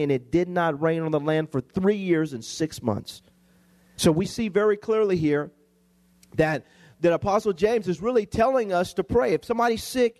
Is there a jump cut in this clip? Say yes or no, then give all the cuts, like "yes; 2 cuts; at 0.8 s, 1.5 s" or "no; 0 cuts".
yes; 1 cut; at 4.0 s